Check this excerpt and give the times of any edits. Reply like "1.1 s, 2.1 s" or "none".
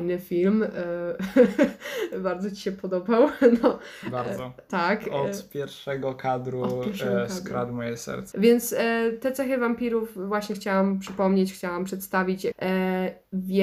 8.3 s, 12.5 s